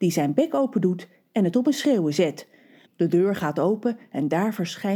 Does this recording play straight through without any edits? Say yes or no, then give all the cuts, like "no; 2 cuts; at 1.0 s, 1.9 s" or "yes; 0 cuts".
no; 1 cut; at 2.8 s